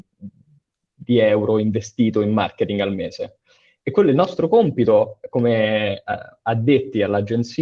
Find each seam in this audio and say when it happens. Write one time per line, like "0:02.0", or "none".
none